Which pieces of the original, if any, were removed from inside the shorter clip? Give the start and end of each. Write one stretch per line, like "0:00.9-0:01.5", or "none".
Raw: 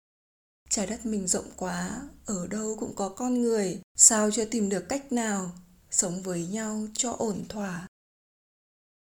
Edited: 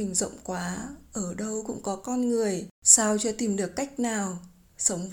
none